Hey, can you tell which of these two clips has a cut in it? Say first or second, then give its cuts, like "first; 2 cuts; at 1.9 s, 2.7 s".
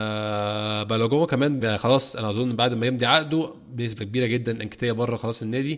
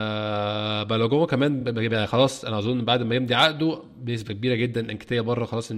first; 1 cut; at 1.6 s